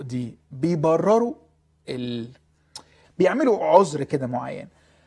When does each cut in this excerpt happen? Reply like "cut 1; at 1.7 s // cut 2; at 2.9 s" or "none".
cut 1; at 3.0 s